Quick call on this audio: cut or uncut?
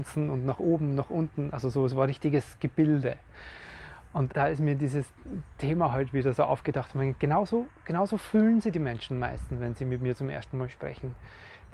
cut